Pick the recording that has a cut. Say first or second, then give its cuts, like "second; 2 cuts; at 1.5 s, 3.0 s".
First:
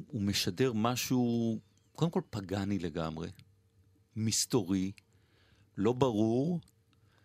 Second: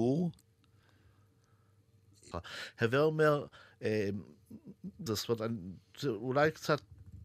second; 2 cuts; at 2.3 s, 5.1 s